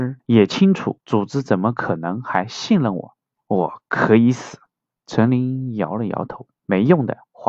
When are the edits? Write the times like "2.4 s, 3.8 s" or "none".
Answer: 1.0 s, 3.4 s, 4.9 s